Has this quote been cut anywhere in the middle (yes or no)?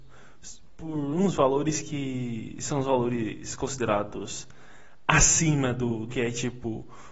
yes